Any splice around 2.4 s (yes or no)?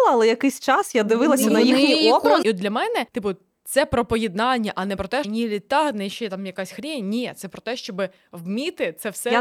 yes